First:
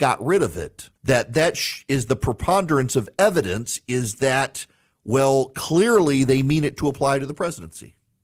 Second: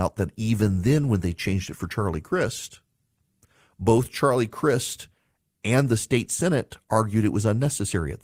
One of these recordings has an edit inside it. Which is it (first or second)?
first